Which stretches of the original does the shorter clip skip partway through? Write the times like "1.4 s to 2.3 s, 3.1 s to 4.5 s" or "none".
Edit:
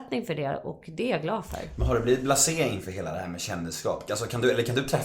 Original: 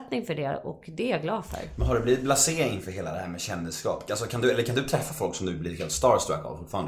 none